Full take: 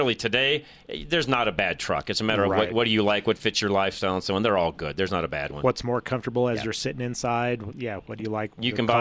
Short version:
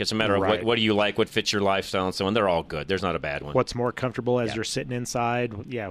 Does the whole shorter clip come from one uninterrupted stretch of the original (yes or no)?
yes